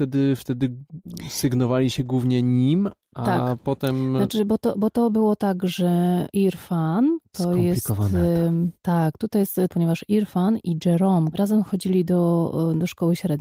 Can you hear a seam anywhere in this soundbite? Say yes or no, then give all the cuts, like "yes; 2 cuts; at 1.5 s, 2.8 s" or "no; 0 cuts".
yes; 2 cuts; at 9.7 s, 11.3 s